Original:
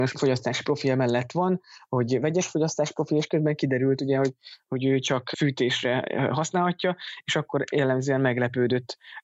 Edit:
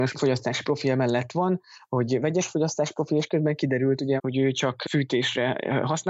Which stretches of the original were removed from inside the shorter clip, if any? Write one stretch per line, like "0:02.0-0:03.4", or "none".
0:04.2-0:04.6